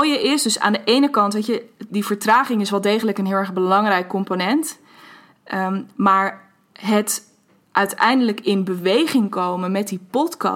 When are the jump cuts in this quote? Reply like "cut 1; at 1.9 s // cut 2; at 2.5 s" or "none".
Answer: cut 1; at 1.9 s